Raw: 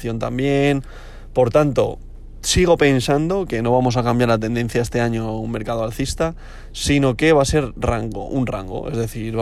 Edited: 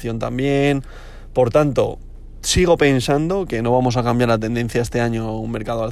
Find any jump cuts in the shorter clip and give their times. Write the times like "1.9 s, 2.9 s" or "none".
none